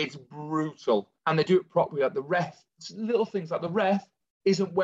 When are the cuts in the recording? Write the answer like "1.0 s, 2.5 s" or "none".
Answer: 1.2 s